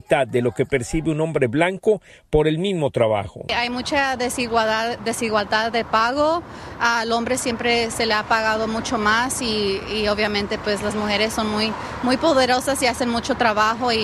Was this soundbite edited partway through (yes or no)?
no